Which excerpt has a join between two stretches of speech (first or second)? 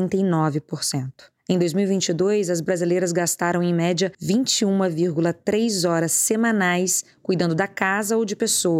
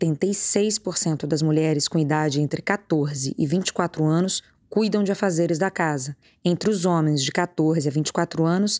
first